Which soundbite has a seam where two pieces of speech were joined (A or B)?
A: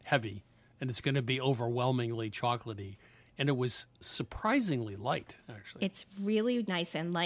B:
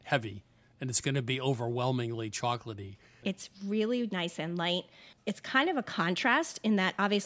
B